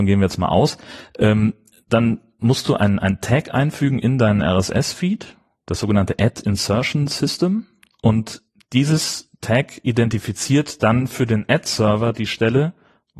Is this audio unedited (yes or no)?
yes